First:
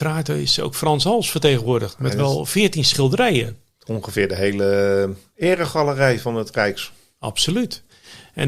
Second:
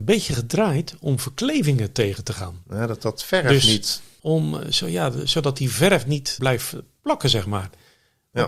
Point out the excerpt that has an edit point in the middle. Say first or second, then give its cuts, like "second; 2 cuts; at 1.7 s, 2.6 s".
second; 2 cuts; at 4.2 s, 6.4 s